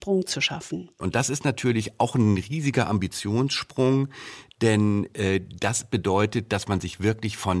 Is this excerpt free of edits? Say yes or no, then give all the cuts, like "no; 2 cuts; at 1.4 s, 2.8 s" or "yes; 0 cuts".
yes; 0 cuts